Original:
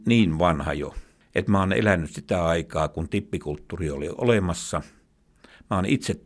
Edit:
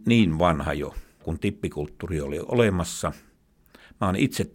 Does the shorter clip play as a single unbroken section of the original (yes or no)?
no